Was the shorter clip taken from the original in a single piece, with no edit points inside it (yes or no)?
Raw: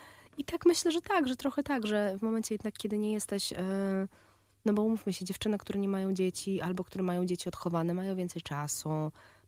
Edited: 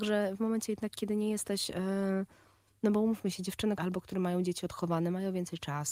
no